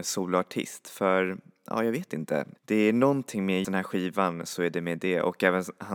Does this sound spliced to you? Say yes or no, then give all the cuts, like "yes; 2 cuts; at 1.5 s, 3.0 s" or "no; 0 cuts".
yes; 2 cuts; at 2.6 s, 3.6 s